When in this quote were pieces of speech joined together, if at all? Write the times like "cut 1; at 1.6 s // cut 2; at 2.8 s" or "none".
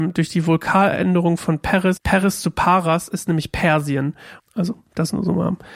cut 1; at 2.0 s // cut 2; at 4.4 s